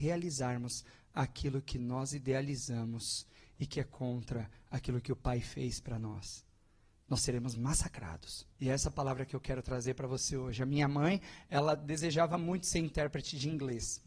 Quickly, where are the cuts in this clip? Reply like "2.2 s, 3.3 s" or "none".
8.5 s